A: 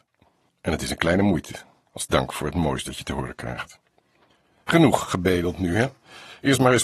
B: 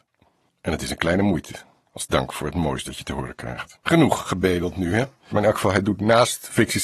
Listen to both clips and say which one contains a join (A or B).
B